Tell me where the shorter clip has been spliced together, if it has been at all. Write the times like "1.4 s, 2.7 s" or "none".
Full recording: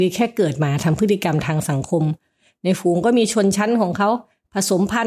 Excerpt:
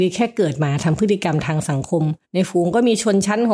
2.2 s